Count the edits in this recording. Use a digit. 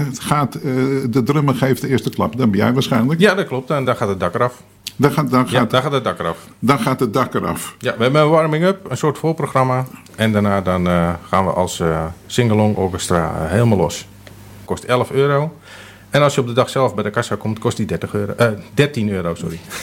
2